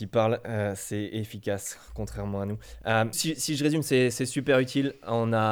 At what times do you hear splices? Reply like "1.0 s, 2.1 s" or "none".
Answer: 3.1 s